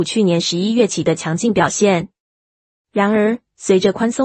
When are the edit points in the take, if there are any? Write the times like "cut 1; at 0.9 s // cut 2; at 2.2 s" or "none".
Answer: none